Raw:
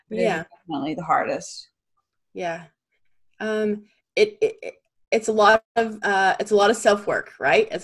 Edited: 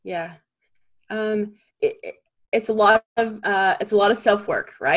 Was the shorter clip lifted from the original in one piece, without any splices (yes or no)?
no